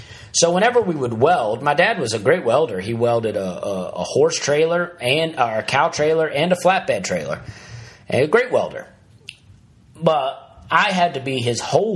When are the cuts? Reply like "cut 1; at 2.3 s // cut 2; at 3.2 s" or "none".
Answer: none